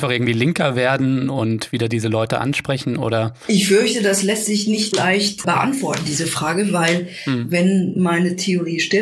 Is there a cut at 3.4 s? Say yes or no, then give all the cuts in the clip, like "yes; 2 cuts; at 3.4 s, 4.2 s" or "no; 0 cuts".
no; 0 cuts